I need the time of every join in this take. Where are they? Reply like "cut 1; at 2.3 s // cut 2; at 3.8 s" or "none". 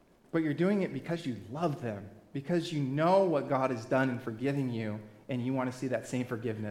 none